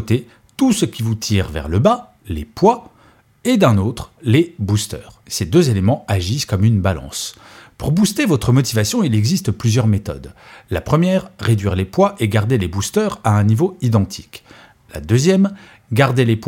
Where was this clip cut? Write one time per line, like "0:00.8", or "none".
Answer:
0:04.2